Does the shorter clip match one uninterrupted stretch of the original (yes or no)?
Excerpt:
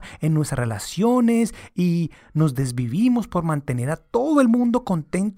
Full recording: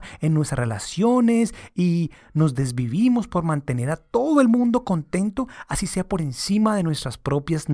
yes